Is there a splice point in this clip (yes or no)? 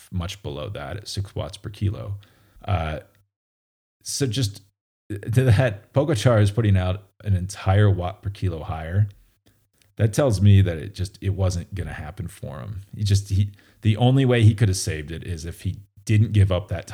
yes